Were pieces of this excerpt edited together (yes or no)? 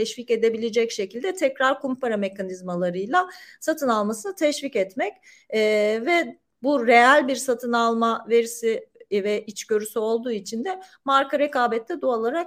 no